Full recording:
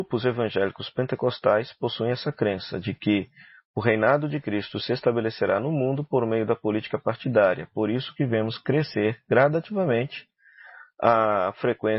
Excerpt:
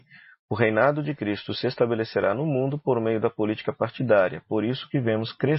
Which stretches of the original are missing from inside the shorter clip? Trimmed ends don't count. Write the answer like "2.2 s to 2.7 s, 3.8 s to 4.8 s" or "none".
none